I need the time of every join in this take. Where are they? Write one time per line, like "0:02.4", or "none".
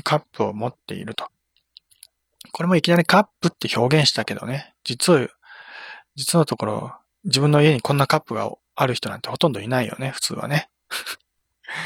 none

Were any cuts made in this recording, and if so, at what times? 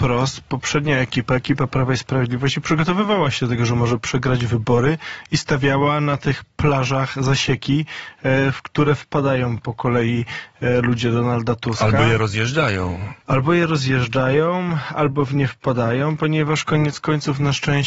0:13.2

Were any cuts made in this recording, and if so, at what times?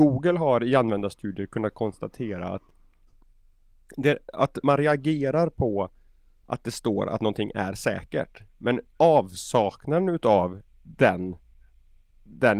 0:04.6

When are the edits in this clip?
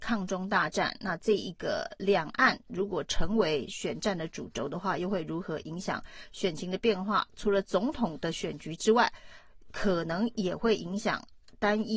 none

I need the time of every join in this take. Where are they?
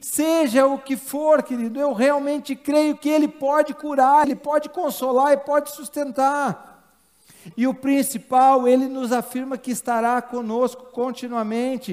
0:04.2
0:07.5

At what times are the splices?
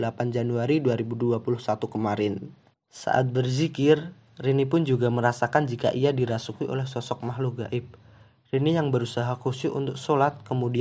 0:02.7

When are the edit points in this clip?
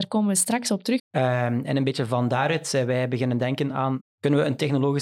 0:01.0
0:04.0

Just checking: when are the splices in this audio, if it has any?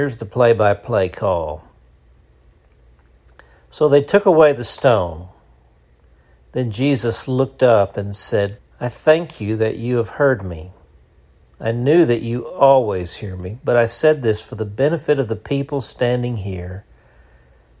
0:08.6

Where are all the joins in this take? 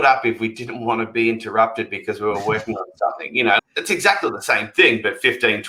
0:03.6

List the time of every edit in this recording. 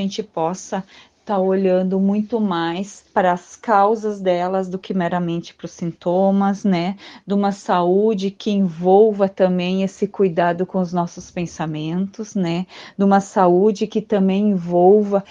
0:03.1

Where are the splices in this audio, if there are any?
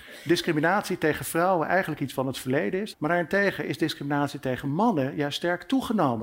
0:02.9

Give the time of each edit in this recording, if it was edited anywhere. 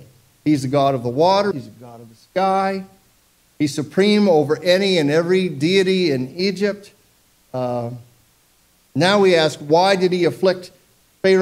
0:01.5

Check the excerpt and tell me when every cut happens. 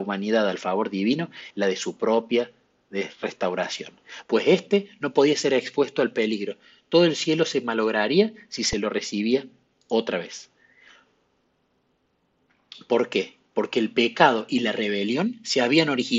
0:01.5
0:04.2

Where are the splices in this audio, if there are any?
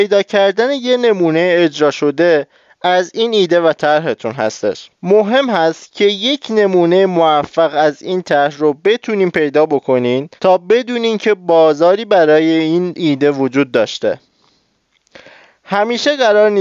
0:04.9
0:10.4

